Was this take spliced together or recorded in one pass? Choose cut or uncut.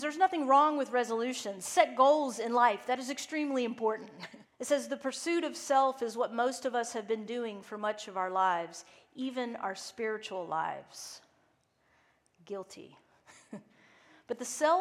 cut